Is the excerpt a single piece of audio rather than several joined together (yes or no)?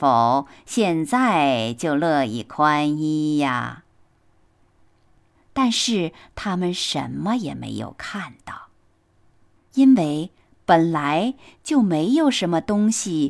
no